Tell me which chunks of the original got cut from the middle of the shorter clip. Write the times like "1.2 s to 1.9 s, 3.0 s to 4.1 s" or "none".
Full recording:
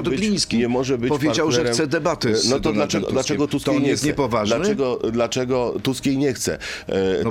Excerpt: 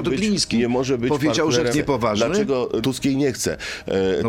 1.7 s to 4.0 s, 5.1 s to 5.8 s

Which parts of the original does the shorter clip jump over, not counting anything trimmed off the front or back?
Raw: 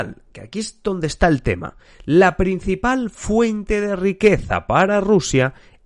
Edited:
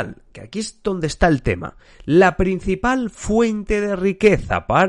none

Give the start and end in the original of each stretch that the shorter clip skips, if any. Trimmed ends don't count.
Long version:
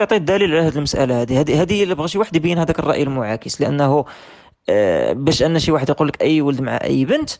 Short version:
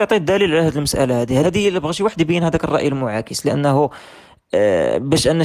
1.4 s to 1.6 s

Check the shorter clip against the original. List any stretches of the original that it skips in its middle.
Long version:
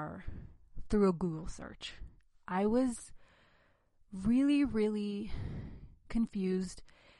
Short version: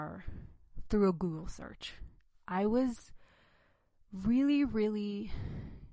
none

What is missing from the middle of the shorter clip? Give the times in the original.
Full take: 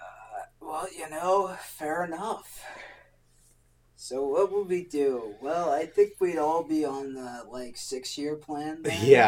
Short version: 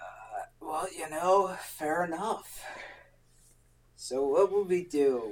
none

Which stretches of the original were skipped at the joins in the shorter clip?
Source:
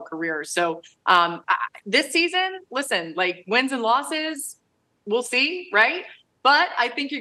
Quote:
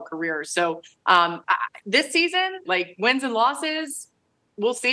2.7 s to 3.1 s

